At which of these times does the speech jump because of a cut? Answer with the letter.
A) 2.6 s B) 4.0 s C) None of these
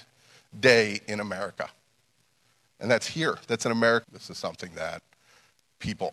B